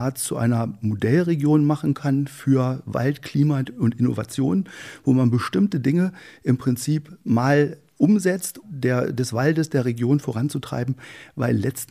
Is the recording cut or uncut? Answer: cut